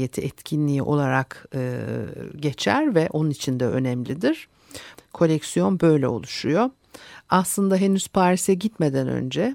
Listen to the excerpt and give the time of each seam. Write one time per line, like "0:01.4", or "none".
0:04.9

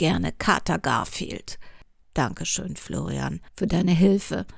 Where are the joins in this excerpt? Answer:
0:02.0

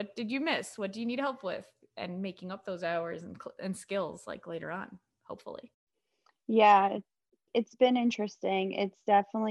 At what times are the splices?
none

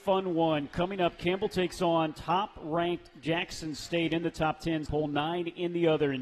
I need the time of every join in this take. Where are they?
0:04.9

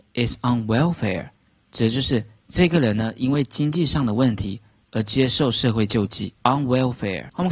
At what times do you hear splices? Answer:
none

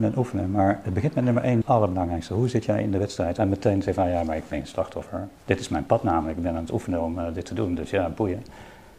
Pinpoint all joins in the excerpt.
0:01.6
0:03.4

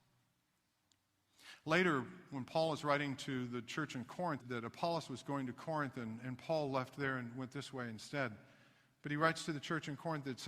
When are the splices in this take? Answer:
0:04.4

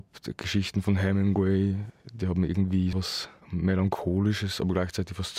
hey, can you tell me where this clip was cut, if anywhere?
0:02.9

